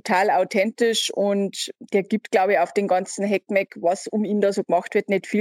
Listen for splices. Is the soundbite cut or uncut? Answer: uncut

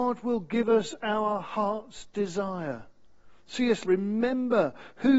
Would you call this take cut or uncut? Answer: cut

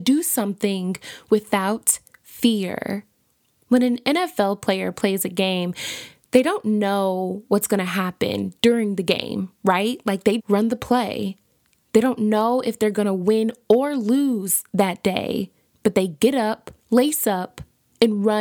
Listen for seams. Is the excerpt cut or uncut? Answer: cut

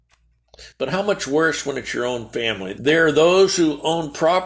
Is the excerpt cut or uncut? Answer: cut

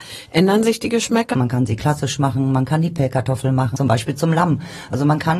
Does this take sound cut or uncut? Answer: cut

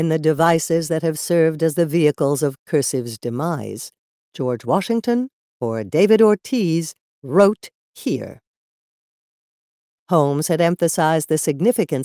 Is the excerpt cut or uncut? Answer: cut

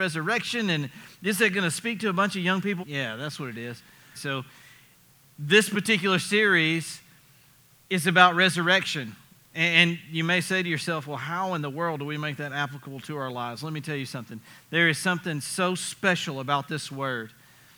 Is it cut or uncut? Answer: cut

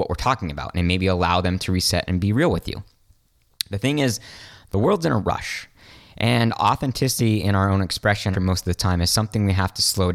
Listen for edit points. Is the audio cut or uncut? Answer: cut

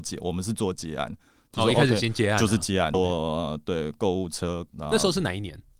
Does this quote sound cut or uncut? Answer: cut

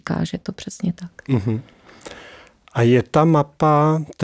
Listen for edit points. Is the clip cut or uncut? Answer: uncut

